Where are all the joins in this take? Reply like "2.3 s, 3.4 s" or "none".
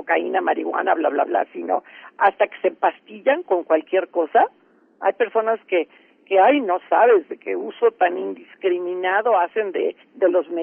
none